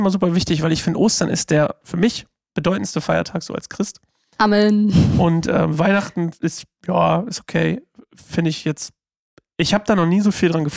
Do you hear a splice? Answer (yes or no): no